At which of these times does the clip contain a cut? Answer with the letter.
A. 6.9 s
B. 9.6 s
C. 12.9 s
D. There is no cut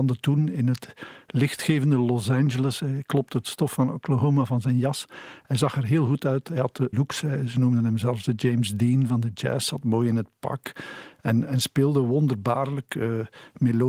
A